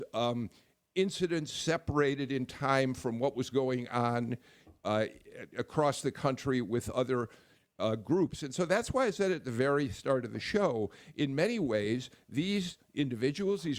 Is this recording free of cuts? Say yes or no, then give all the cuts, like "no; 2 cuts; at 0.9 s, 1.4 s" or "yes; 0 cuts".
yes; 0 cuts